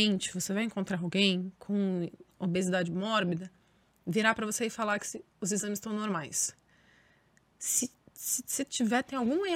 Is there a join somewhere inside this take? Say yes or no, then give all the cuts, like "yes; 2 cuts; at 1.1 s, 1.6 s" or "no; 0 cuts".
no; 0 cuts